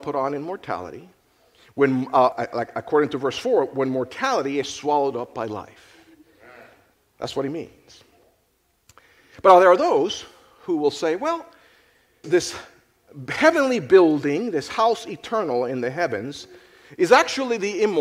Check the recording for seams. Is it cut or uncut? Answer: cut